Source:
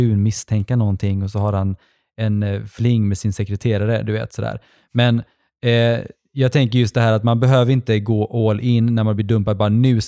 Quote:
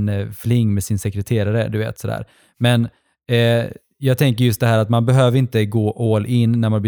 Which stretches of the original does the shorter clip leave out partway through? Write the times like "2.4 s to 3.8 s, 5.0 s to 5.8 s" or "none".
none